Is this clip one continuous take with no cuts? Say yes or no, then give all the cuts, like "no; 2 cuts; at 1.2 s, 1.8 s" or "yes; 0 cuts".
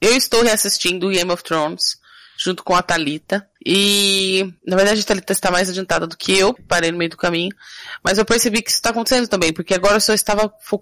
no; 2 cuts; at 3.6 s, 6.6 s